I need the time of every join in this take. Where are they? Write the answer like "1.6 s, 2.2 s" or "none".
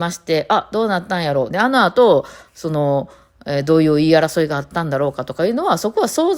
1.5 s